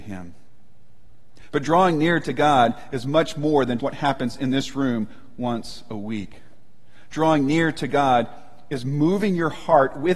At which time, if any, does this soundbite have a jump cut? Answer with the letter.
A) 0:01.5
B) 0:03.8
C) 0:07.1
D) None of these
B